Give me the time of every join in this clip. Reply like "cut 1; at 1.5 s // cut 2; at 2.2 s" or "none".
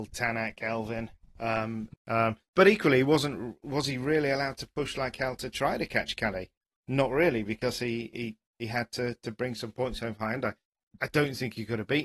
cut 1; at 1.9 s